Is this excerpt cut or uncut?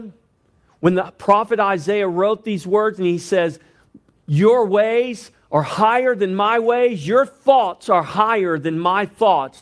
uncut